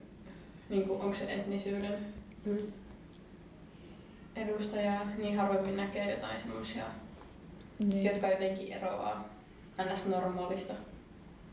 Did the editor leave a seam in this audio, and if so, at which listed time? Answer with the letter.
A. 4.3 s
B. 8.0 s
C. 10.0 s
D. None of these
D